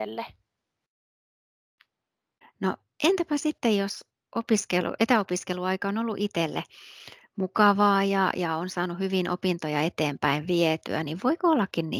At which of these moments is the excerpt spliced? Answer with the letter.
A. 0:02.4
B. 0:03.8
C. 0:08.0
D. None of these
A